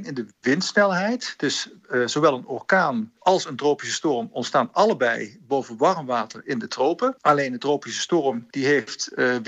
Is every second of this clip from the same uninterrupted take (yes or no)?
yes